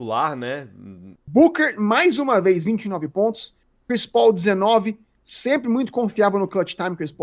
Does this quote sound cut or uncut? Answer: cut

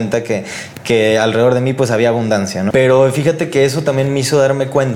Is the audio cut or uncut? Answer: cut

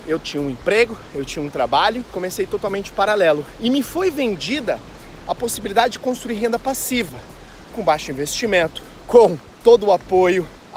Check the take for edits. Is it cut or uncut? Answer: uncut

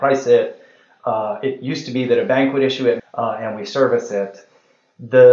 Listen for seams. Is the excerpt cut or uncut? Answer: cut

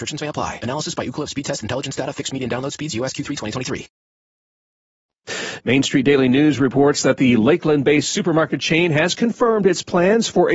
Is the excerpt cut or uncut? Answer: cut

